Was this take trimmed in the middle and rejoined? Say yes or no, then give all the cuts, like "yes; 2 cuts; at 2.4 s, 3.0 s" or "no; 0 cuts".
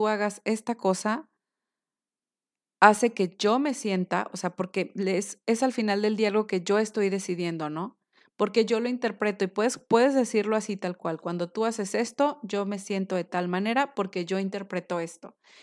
no; 0 cuts